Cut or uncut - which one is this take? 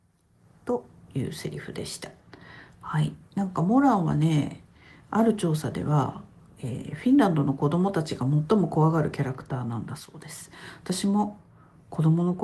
uncut